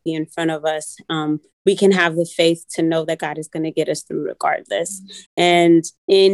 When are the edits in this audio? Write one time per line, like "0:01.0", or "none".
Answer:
0:05.2